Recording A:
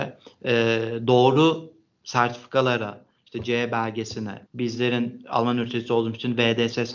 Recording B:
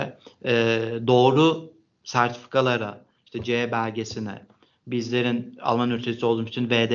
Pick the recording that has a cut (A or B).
A